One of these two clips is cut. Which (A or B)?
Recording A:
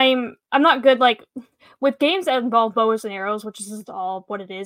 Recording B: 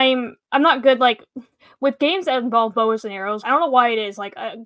B